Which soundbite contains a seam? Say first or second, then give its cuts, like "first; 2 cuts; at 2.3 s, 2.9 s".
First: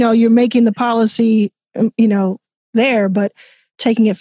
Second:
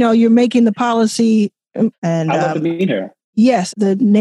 second; 1 cut; at 1.9 s